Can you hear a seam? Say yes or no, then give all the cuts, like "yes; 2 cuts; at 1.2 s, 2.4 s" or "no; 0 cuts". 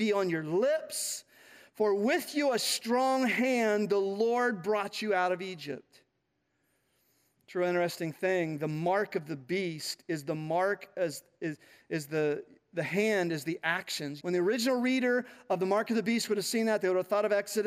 yes; 1 cut; at 14.2 s